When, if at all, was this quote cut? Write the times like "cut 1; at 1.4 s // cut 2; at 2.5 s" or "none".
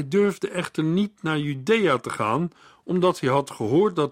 none